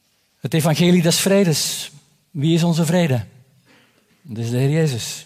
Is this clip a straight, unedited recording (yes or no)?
yes